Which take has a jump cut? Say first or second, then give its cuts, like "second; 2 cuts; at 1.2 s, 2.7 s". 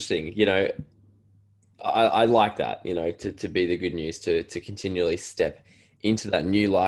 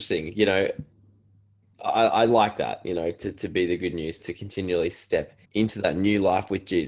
second; 2 cuts; at 4.2 s, 5.4 s